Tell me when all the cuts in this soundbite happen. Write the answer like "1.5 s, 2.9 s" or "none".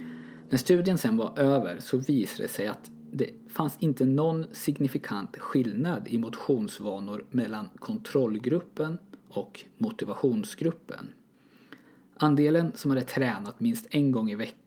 9.2 s